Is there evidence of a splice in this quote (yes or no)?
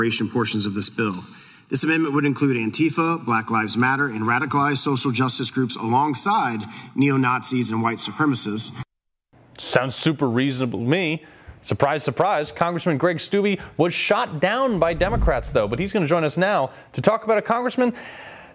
no